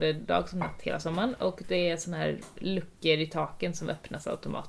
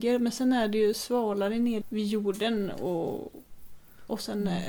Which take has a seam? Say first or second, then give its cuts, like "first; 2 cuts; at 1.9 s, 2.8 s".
second; 1 cut; at 1.8 s